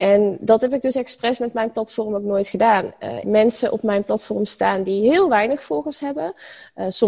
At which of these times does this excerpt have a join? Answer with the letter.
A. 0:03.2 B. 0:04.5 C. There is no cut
A